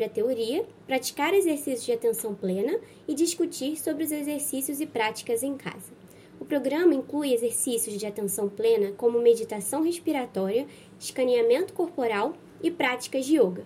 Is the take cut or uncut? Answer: uncut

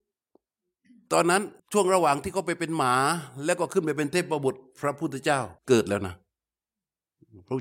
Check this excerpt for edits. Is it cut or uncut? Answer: cut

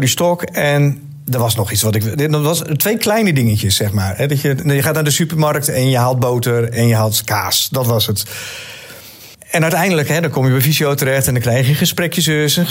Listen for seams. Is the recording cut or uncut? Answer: uncut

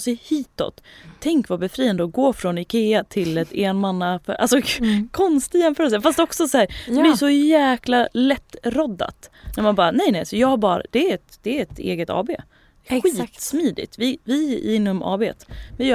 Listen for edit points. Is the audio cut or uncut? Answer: uncut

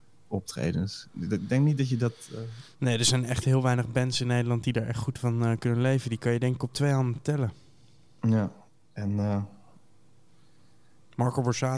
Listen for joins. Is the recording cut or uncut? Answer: uncut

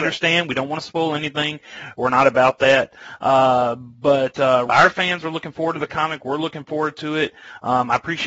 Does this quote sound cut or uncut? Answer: cut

